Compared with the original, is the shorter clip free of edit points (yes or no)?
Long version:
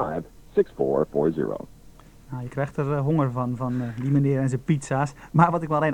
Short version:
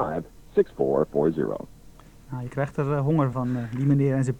no